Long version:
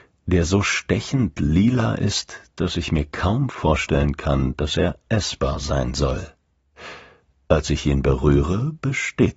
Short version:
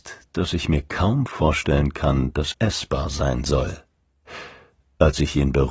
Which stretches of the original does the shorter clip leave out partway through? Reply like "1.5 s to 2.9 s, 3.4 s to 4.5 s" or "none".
4.7 s to 5.0 s